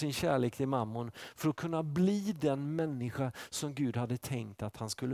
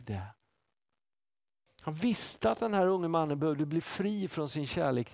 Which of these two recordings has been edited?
second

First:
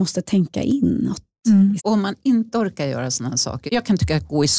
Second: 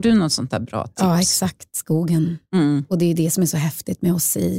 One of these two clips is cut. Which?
first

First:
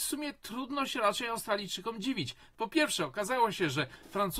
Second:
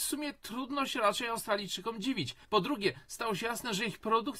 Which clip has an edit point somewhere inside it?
second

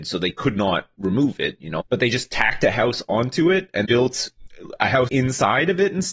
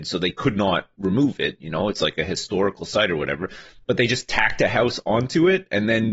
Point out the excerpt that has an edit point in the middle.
first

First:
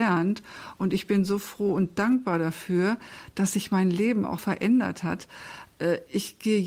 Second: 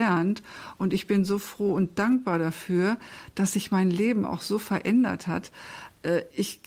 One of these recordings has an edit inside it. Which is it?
first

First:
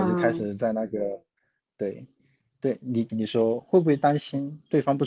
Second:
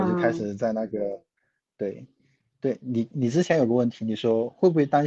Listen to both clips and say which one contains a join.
first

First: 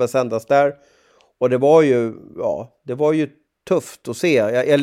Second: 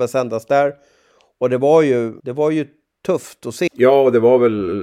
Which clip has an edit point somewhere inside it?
second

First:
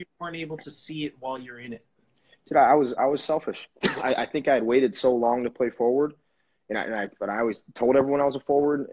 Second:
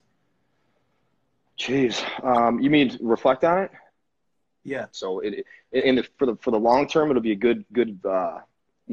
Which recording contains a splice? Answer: second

